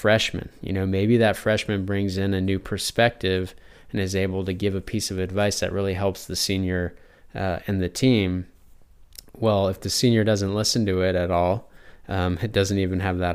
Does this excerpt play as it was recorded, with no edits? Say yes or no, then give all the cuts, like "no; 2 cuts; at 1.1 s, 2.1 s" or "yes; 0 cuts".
yes; 0 cuts